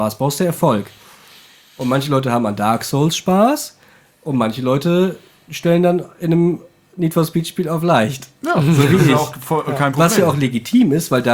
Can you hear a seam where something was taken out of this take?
no; 0 cuts

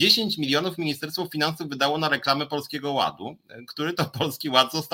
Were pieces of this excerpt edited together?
no; 0 cuts

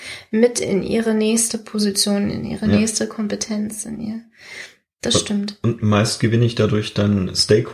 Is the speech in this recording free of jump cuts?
yes; 0 cuts

